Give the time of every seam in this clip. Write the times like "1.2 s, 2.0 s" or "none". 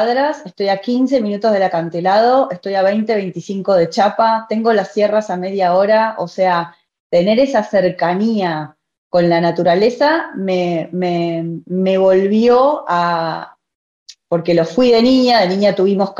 none